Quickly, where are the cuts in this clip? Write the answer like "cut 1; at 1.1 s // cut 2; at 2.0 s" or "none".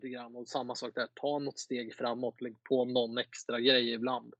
none